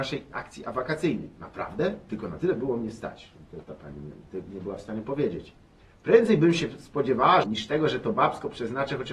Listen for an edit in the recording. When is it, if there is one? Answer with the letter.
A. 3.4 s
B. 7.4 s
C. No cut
B